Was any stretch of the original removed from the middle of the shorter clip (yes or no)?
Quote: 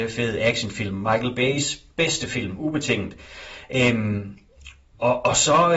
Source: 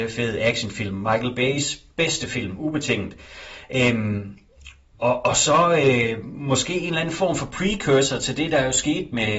no